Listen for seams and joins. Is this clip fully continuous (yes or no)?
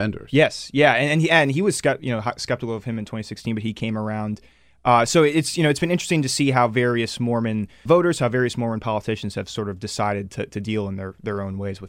no